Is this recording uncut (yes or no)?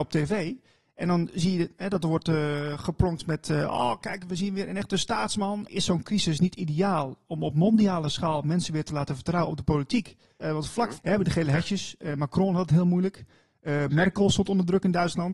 no